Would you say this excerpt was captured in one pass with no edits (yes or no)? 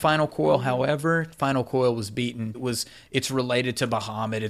no